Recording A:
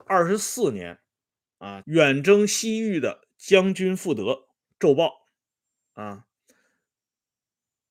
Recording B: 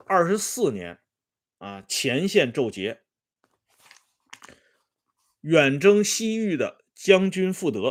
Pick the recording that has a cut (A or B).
A